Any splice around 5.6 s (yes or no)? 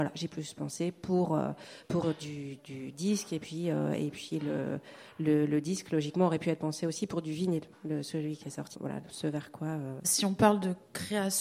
no